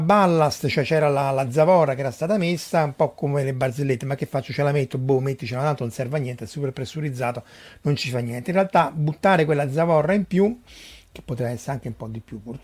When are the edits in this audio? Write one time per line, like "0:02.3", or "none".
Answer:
none